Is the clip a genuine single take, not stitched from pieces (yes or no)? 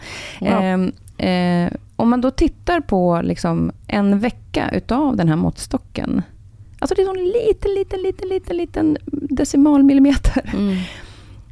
yes